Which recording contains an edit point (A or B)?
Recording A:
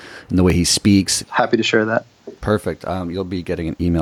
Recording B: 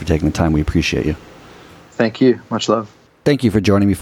A